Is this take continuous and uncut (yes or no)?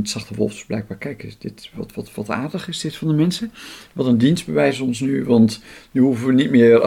no